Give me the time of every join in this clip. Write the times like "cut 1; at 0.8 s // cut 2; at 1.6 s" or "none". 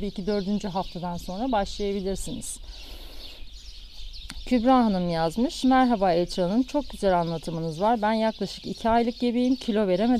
none

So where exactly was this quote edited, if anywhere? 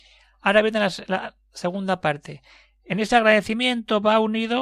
none

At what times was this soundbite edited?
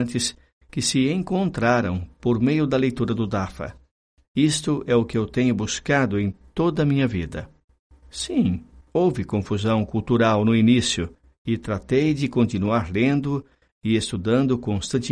none

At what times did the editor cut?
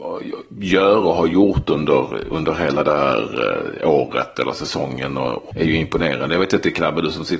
cut 1; at 5.5 s

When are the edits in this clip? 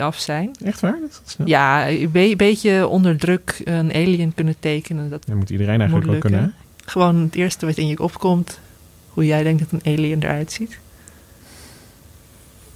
cut 1; at 5.3 s // cut 2; at 6.6 s

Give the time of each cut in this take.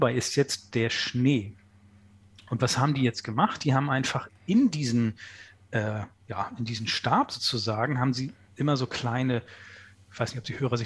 none

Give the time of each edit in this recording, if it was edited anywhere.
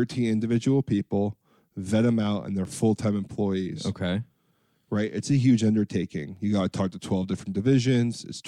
none

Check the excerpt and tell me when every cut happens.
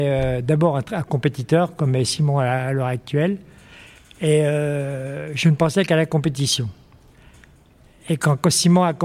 none

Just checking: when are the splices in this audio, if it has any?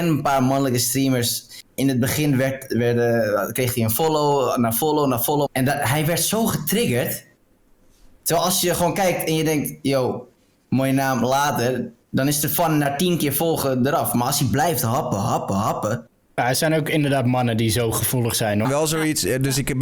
cut 1; at 5.5 s // cut 2; at 16.3 s // cut 3; at 18.6 s

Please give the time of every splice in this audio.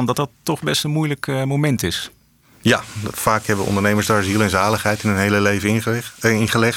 none

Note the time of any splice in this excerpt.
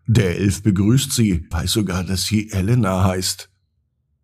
cut 1; at 1.5 s

